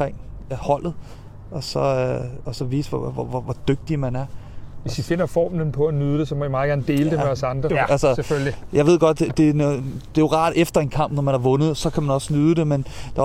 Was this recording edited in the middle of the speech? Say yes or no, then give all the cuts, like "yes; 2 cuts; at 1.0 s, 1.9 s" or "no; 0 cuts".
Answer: yes; 1 cut; at 7.7 s